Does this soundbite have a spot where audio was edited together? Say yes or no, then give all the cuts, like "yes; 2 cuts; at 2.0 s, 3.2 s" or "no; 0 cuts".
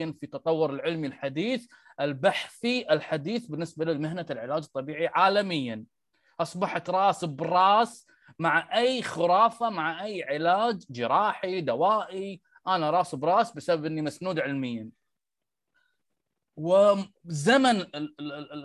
no; 0 cuts